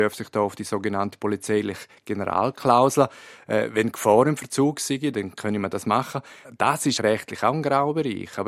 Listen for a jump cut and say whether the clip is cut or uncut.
cut